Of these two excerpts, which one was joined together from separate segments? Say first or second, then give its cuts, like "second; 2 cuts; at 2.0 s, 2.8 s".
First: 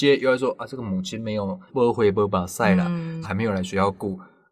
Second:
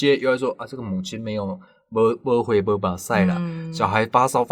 first; 2 cuts; at 1.7 s, 3.2 s